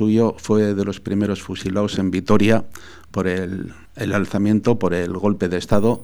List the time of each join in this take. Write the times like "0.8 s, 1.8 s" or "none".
3.8 s